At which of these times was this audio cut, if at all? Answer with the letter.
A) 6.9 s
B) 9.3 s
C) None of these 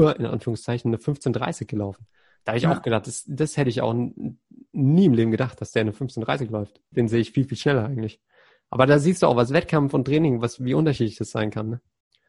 A